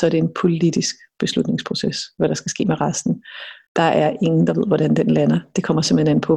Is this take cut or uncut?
uncut